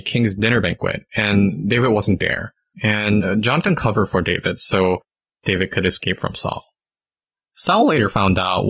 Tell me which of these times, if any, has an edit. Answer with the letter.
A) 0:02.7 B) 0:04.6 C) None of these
A